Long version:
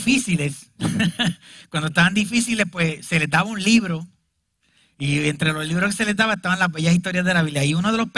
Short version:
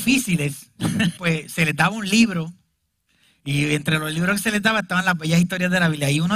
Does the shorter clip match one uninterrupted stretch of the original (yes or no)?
no